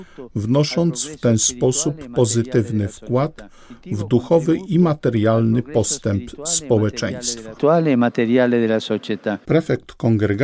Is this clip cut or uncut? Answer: cut